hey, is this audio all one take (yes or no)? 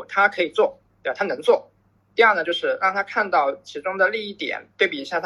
yes